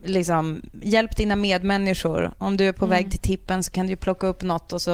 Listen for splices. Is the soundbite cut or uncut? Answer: uncut